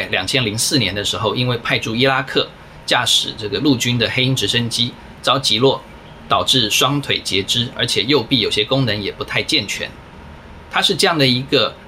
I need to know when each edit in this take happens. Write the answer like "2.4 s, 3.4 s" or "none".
none

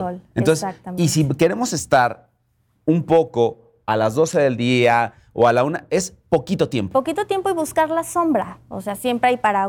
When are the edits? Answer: none

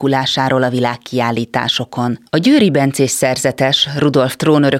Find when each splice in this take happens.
2.3 s

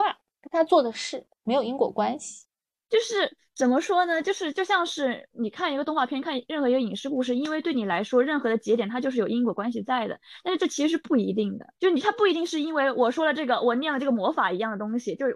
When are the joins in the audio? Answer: 11.8 s

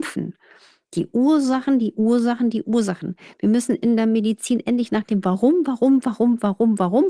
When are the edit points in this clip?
none

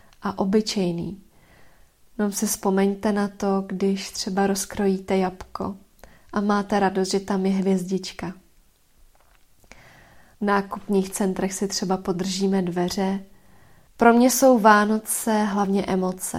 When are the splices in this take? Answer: 10.3 s, 13.9 s

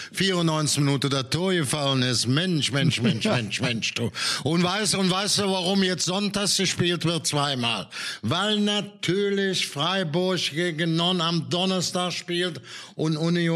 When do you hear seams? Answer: none

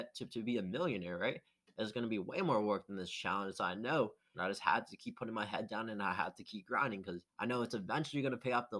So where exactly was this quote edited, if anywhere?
4.3 s, 7.3 s

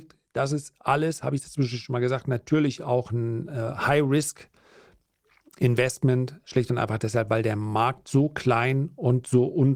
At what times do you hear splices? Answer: none

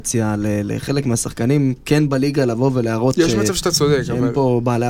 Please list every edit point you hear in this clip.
none

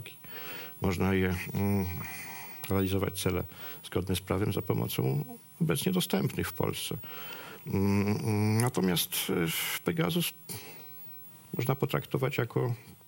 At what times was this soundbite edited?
none

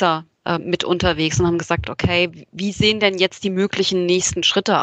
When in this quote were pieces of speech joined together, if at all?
none

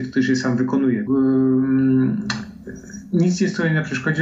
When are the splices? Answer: 1.1 s

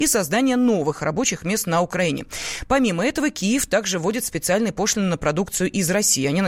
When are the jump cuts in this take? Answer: none

